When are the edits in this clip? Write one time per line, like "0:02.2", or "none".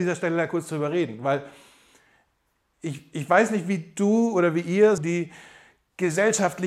0:05.0